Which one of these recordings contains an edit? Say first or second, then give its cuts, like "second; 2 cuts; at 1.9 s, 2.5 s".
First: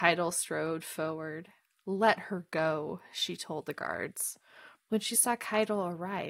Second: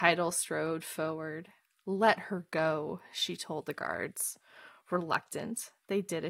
first; 1 cut; at 4.7 s